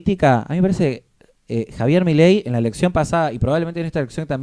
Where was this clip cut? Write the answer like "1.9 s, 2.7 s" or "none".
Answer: none